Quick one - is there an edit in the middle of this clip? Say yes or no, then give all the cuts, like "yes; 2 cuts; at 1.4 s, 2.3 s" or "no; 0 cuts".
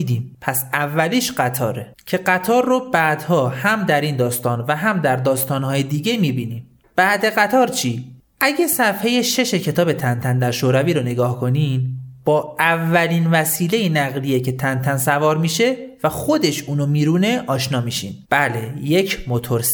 yes; 1 cut; at 18.2 s